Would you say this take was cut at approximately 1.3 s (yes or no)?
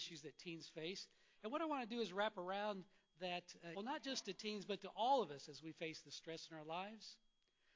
no